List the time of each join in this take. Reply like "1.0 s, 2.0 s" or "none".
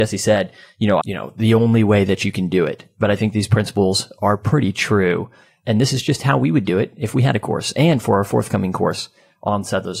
1.0 s